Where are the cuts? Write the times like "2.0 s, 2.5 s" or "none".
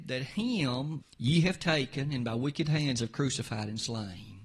1.0 s